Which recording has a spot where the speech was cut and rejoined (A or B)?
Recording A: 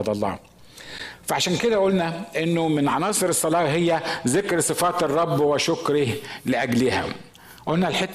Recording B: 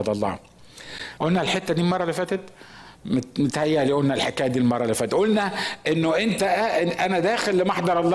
B